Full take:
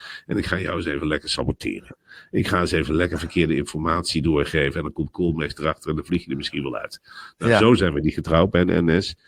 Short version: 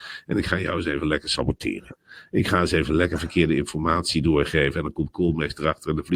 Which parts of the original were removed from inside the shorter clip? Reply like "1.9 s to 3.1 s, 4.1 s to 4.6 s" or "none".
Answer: none